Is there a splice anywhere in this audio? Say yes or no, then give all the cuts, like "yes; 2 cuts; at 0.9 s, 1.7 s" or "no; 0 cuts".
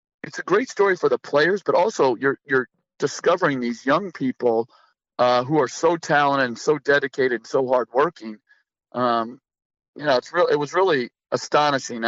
no; 0 cuts